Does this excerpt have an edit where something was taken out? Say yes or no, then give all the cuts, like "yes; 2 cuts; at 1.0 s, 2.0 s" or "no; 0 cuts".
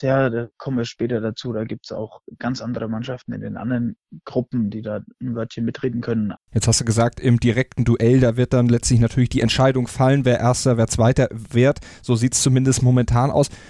yes; 1 cut; at 6.3 s